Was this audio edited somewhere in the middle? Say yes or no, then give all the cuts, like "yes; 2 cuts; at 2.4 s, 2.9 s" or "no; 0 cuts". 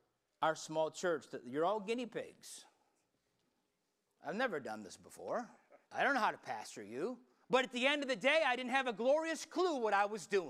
yes; 2 cuts; at 5.8 s, 7.4 s